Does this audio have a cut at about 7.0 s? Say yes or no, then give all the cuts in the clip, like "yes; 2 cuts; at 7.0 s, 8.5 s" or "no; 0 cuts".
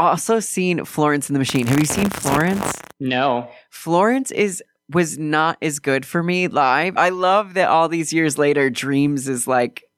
yes; 2 cuts; at 2.9 s, 7.0 s